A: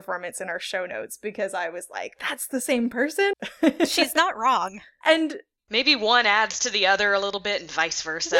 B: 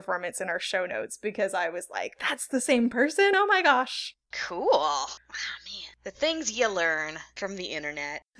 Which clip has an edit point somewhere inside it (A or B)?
A